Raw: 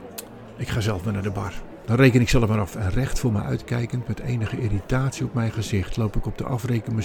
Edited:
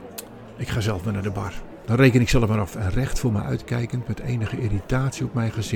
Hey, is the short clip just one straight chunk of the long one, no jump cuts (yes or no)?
yes